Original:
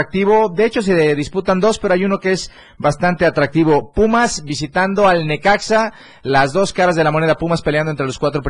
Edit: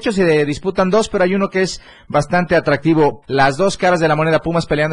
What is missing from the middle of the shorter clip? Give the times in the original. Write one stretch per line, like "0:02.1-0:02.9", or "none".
0:03.9-0:06.2